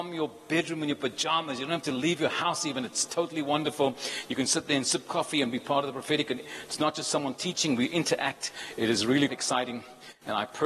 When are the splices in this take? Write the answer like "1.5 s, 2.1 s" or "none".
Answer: 9.3 s